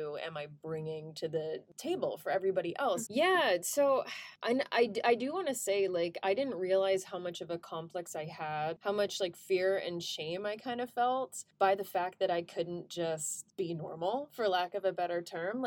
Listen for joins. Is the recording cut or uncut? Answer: cut